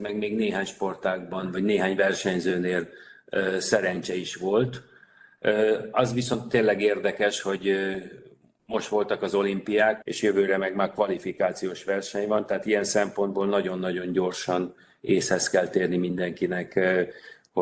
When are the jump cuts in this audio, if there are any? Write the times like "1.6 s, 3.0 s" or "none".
10.0 s